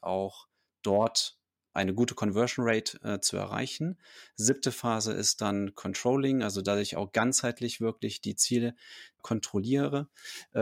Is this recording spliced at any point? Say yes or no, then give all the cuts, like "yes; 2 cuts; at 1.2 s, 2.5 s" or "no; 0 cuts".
no; 0 cuts